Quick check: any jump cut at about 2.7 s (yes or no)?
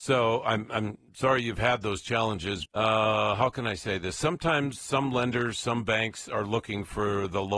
yes